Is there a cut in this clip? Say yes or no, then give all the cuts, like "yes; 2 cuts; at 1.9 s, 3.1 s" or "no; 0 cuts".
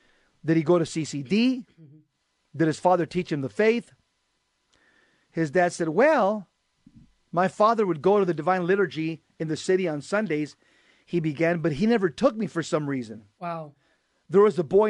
no; 0 cuts